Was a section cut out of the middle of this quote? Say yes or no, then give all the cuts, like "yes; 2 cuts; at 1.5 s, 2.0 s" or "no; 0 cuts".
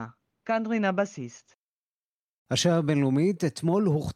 no; 0 cuts